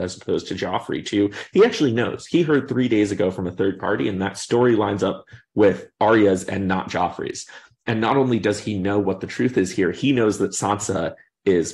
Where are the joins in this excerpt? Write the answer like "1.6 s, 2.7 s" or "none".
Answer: none